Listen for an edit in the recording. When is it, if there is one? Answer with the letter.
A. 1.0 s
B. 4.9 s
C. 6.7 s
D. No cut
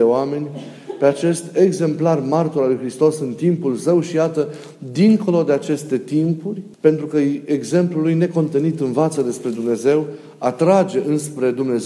C